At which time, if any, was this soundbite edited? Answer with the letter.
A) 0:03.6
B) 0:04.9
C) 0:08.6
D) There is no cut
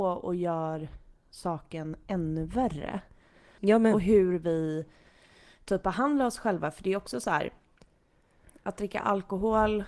A